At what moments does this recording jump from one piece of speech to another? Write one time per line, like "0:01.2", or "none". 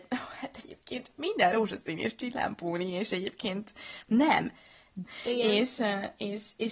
0:05.0